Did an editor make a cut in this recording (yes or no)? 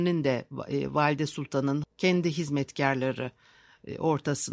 yes